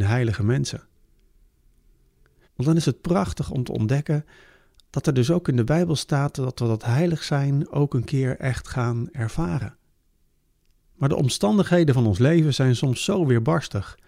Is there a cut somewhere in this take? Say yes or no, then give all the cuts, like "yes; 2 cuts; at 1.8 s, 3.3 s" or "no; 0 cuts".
yes; 2 cuts; at 2.4 s, 10.9 s